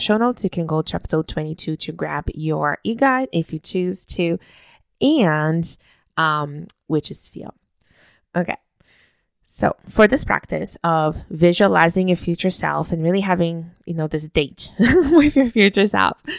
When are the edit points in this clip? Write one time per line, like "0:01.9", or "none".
0:06.9